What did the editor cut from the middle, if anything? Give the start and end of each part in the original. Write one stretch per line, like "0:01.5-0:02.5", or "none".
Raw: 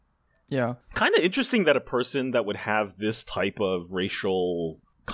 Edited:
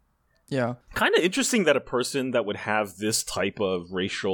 none